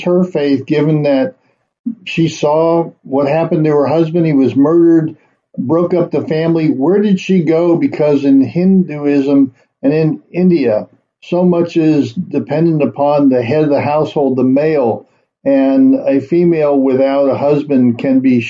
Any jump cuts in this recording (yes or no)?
no